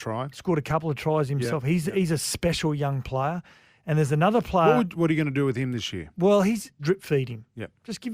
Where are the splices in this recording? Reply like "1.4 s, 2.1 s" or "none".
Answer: 6.8 s